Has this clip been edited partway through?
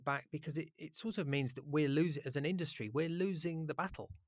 no; 0 cuts

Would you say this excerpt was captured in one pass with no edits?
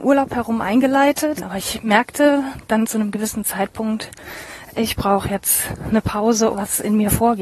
no; 2 cuts; at 1.4 s, 6.5 s

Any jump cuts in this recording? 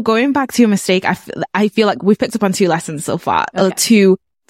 no; 0 cuts

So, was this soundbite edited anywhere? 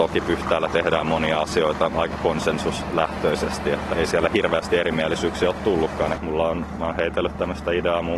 yes; 2 cuts; at 3.9 s, 6.1 s

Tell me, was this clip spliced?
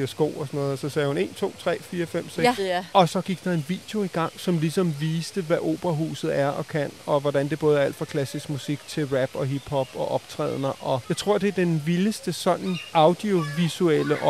yes; 1 cut; at 2.6 s

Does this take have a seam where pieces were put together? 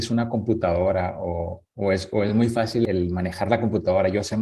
no; 0 cuts

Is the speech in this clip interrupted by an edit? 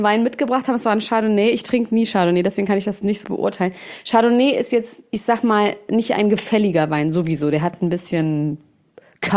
yes; 1 cut; at 3.2 s

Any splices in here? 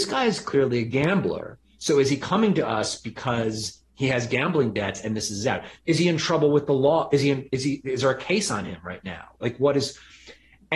no; 0 cuts

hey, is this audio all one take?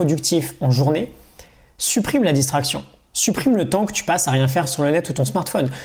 yes; 0 cuts

